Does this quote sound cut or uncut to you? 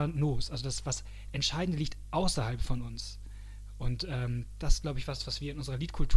uncut